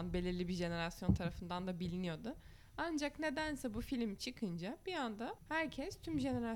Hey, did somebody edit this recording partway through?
yes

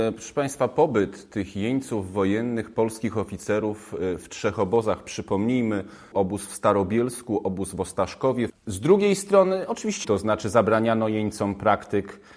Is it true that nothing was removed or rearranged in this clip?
no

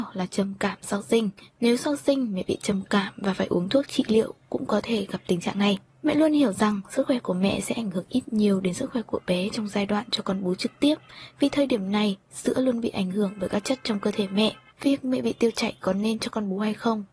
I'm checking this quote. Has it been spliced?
yes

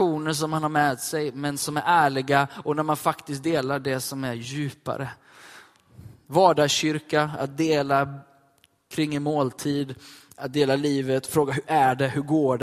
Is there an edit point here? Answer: no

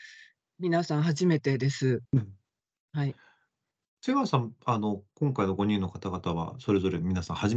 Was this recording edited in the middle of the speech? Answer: yes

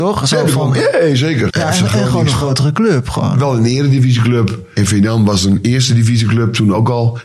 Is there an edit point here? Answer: yes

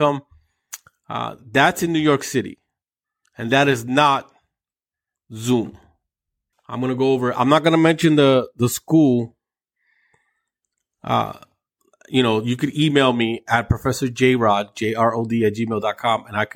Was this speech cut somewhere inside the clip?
yes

